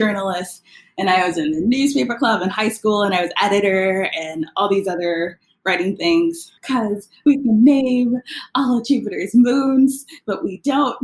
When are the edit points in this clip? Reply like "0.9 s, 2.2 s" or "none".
6.6 s